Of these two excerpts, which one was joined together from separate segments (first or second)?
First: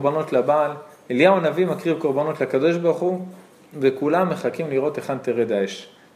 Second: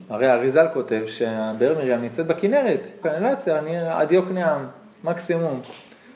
second